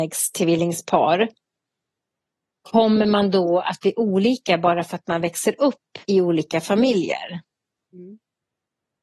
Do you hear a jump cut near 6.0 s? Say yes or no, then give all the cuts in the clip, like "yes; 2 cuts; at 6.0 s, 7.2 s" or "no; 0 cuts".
yes; 1 cut; at 6.0 s